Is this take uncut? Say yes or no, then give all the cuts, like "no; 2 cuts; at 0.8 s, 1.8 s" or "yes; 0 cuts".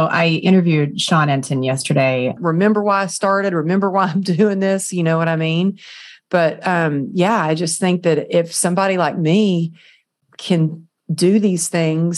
no; 1 cut; at 2.4 s